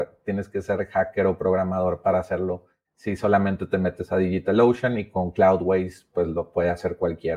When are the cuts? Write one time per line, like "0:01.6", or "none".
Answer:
none

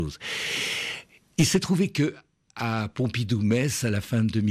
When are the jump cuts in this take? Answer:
none

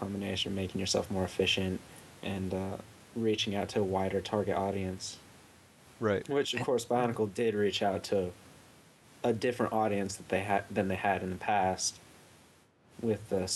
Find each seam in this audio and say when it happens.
none

